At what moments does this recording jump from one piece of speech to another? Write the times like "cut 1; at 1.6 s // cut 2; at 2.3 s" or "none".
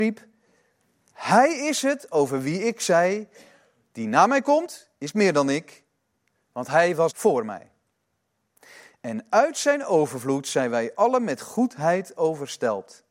cut 1; at 7.1 s